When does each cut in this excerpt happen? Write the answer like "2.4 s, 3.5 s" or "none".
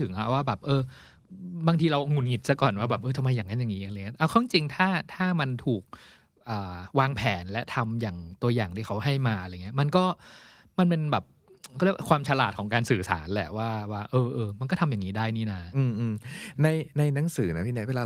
none

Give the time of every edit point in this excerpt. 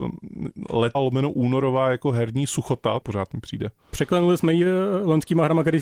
0.9 s, 3.0 s

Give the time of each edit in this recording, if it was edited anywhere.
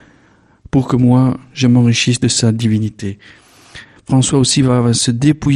4.0 s

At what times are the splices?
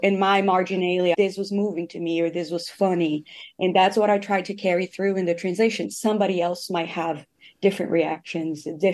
1.1 s

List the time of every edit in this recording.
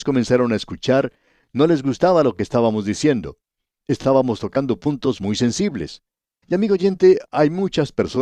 6.4 s

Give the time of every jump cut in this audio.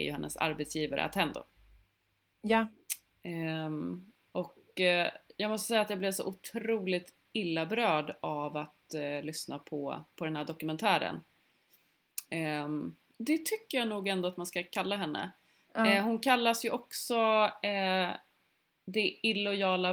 13.1 s

